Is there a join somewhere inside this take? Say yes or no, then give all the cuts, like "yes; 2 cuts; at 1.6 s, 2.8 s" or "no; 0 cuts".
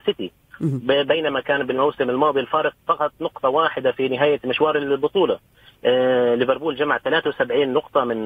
no; 0 cuts